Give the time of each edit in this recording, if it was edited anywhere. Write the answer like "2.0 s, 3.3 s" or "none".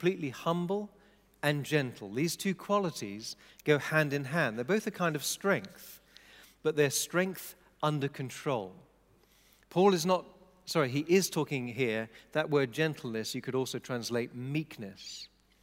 none